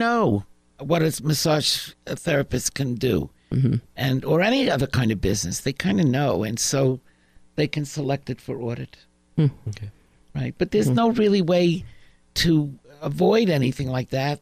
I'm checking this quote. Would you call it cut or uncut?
uncut